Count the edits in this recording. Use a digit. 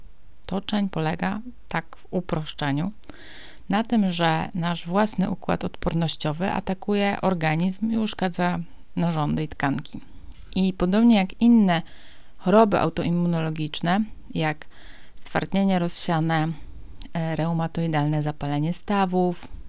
0